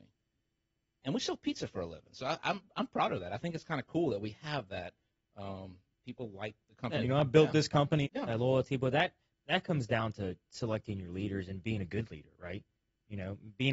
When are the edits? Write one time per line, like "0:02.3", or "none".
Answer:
0:07.0
0:08.0